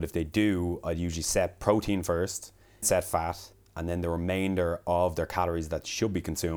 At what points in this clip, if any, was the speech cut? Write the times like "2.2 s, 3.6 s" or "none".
2.8 s